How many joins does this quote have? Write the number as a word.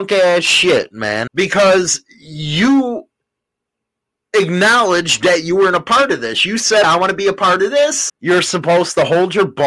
three